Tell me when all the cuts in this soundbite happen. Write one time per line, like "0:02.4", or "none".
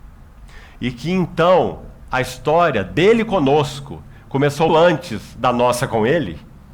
0:04.7